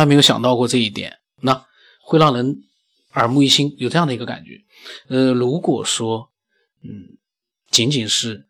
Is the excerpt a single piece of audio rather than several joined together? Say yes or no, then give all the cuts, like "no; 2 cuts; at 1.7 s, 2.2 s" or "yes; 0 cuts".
yes; 0 cuts